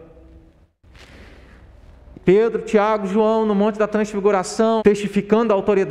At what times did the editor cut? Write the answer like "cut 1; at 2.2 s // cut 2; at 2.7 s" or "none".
cut 1; at 2.1 s // cut 2; at 4.8 s